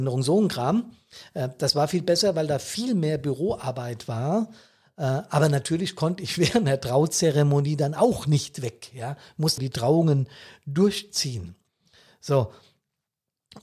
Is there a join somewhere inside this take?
yes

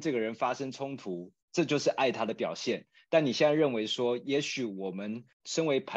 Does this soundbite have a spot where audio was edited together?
no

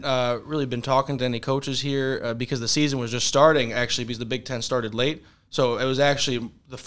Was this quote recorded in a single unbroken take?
yes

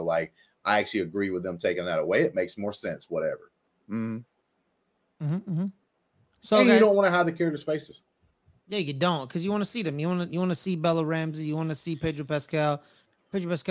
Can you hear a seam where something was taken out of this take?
no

